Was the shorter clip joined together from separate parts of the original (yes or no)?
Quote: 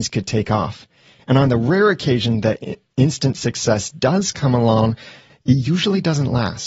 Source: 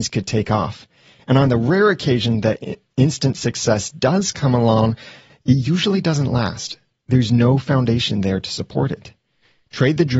no